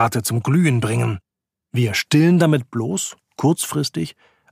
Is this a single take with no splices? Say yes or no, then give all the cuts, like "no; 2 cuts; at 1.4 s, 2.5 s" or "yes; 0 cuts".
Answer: no; 1 cut; at 1.6 s